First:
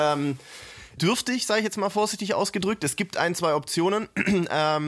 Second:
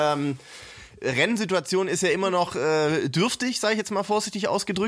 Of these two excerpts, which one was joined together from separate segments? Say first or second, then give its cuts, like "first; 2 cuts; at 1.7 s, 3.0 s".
first; 1 cut; at 1.0 s